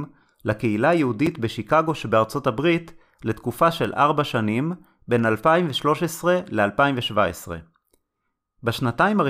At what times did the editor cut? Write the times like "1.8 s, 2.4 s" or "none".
none

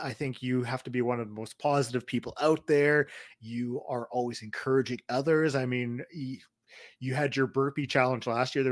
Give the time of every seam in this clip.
none

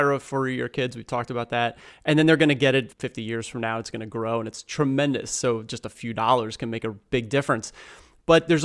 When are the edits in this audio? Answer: none

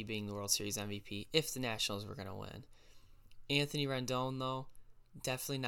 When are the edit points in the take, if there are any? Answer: none

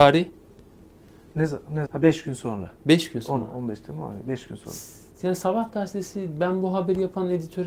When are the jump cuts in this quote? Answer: 1.9 s

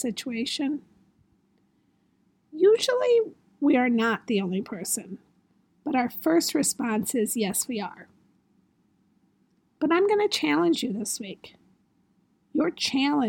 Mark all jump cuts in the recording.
none

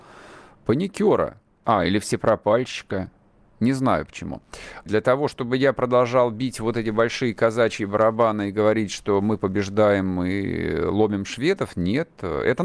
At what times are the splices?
1.6 s, 4.9 s

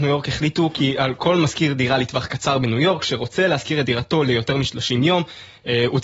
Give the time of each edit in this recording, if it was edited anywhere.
none

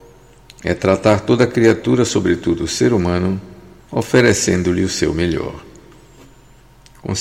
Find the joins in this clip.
3.8 s

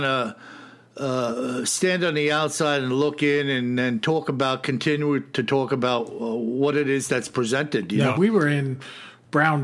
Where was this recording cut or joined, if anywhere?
8.1 s

